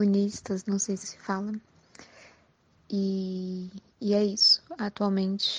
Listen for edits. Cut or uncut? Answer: cut